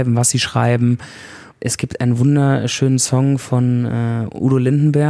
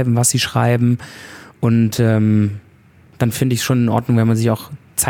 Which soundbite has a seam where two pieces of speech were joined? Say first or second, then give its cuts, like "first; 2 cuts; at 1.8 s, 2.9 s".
first; 1 cut; at 1.5 s